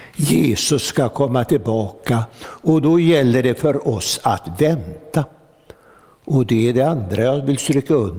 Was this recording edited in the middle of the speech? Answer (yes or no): no